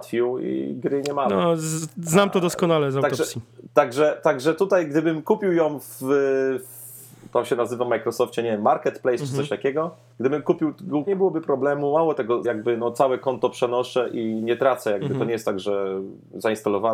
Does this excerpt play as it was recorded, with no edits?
no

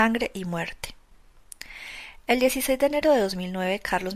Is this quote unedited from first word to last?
yes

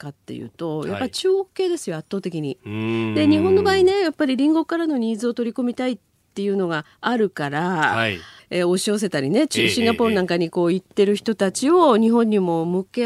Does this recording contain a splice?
yes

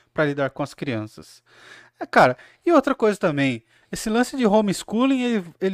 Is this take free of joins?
yes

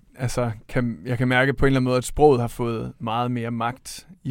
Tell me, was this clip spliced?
no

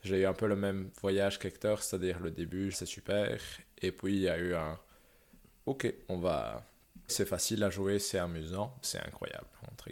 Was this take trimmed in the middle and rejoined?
yes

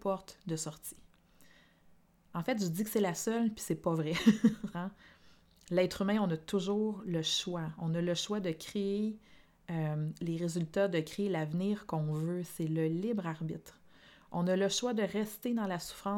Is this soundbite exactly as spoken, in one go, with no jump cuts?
no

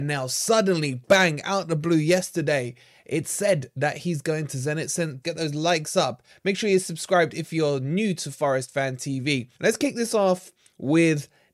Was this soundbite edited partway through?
yes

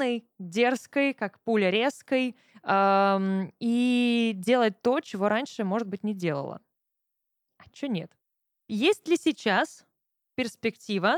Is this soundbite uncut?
yes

